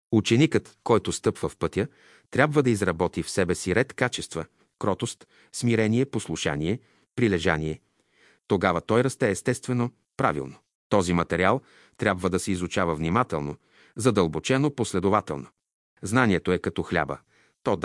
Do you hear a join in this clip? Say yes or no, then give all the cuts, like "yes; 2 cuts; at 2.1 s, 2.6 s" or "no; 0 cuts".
yes; 1 cut; at 10.7 s